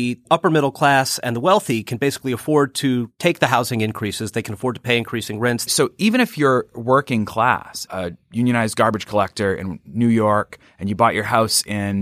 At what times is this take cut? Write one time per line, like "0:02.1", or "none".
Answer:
0:05.7
0:07.9